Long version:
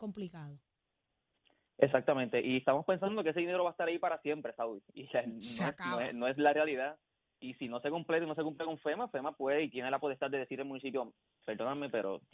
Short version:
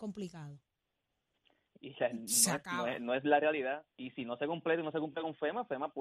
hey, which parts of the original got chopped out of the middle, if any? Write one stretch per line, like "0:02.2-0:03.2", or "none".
0:01.7-0:04.8
0:07.0-0:07.3

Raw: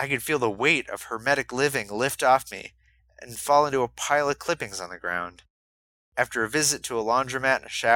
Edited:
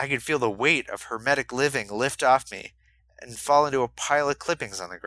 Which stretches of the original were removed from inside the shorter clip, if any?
none

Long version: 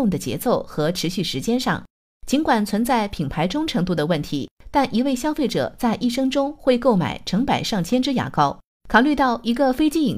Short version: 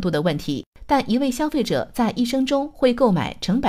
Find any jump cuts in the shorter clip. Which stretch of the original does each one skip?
none

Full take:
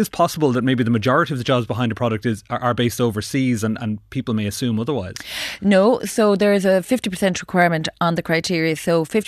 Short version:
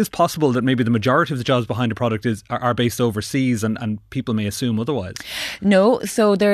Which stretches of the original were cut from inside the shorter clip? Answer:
none

